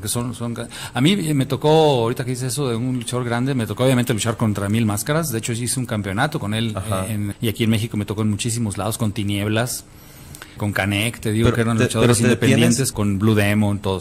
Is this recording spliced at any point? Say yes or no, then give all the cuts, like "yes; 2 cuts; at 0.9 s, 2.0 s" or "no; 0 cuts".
yes; 3 cuts; at 7.3 s, 10.6 s, 12.9 s